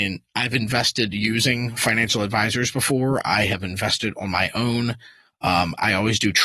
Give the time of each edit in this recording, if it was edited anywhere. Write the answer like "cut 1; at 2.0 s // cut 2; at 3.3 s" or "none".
none

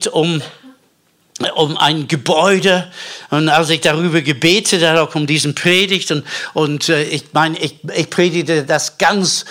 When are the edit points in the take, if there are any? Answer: none

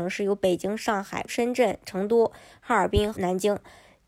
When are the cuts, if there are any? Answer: cut 1; at 1.3 s // cut 2; at 3.1 s

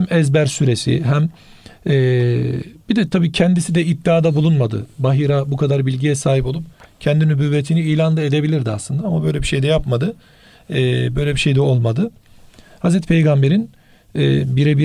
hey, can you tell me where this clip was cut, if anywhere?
none

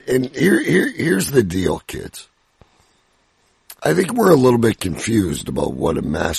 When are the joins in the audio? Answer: cut 1; at 3.8 s

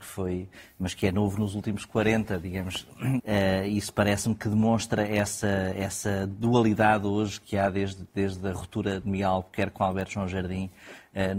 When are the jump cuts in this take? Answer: cut 1; at 3.2 s

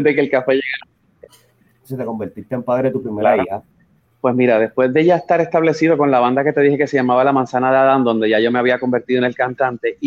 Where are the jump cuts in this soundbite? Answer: cut 1; at 1.6 s // cut 2; at 4.1 s

